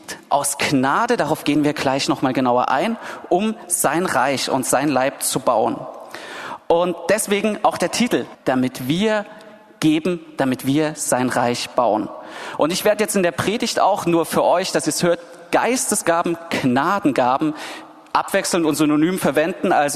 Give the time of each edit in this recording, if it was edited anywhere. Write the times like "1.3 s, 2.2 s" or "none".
8.3 s